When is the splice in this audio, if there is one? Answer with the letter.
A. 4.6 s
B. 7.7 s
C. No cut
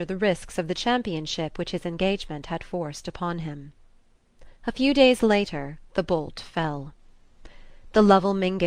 A